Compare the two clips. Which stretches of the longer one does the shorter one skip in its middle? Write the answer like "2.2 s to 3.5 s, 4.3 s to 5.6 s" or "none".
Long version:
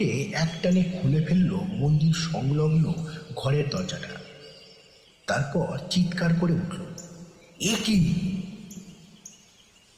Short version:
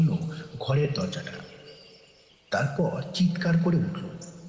none